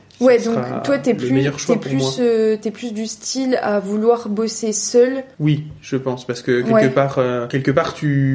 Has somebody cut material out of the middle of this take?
no; 0 cuts

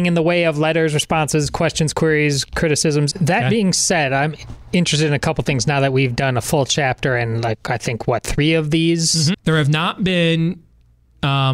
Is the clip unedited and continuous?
no; 2 cuts; at 3.1 s, 9.3 s

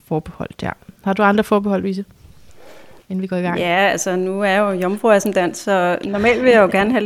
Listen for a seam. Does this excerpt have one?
no; 0 cuts

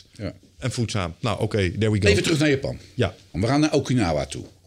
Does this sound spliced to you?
yes; 1 cut; at 3.3 s

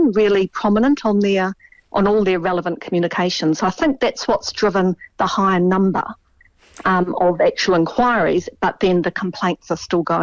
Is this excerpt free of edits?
yes; 0 cuts

